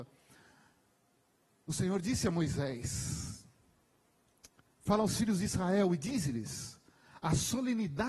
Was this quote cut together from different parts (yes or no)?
no